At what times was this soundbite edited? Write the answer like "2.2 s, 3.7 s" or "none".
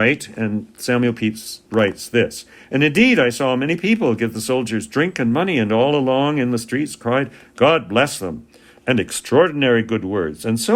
1.7 s